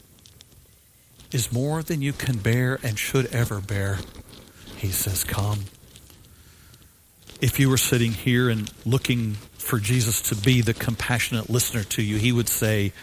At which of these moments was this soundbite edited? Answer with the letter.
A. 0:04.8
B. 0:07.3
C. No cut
B